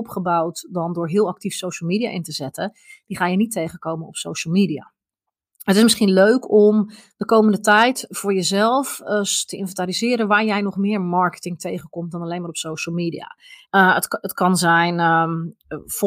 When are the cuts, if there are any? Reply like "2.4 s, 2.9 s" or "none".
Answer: 13.7 s